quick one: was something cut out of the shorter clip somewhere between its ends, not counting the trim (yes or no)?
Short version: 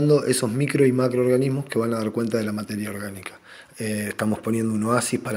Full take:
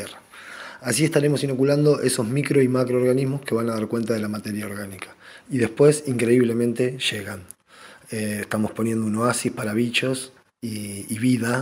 yes